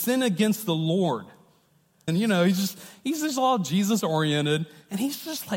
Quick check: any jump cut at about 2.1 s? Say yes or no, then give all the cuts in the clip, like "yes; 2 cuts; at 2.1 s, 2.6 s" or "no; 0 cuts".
yes; 1 cut; at 2.1 s